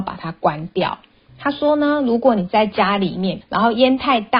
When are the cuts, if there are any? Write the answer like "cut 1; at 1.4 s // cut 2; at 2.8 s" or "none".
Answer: cut 1; at 1.3 s // cut 2; at 3.4 s